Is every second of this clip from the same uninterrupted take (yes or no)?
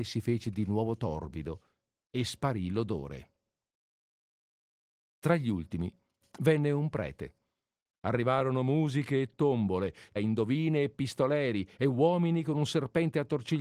no